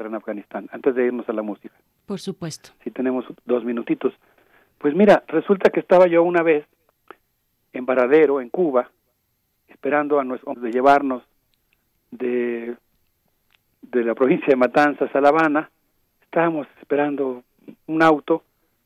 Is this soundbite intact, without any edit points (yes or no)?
no